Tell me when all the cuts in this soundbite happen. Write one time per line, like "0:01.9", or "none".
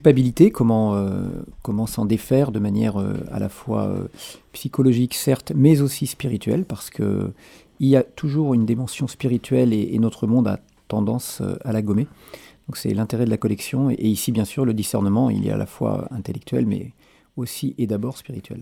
none